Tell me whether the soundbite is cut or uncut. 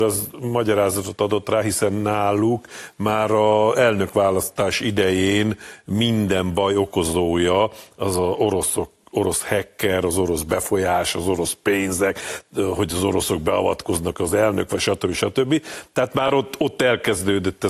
uncut